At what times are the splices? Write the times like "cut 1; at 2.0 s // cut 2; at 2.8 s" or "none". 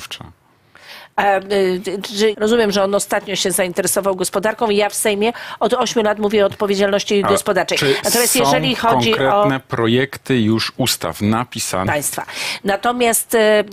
cut 1; at 2.3 s // cut 2; at 11.9 s